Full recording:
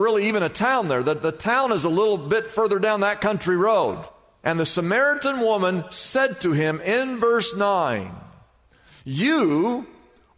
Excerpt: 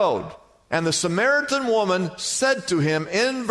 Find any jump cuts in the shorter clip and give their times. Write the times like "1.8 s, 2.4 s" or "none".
none